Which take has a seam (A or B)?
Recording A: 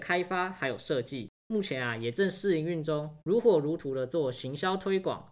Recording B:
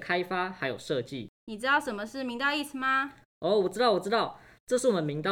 B